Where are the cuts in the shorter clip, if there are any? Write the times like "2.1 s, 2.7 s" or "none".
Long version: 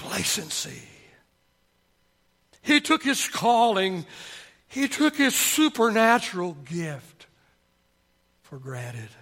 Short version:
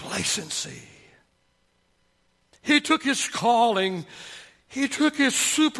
none